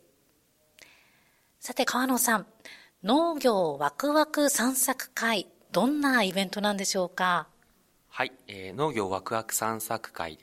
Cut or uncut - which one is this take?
uncut